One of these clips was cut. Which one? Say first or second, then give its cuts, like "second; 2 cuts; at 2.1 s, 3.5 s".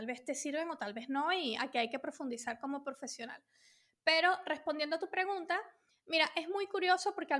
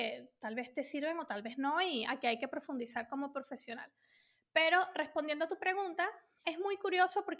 second; 1 cut; at 6.4 s